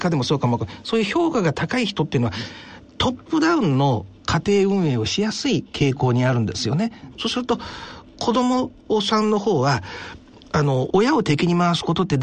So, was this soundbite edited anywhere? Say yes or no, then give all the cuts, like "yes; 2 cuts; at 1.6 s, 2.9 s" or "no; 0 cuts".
yes; 2 cuts; at 7.1 s, 10.9 s